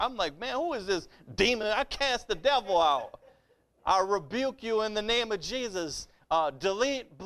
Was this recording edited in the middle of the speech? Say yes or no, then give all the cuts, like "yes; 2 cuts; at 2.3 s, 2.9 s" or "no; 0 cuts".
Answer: no; 0 cuts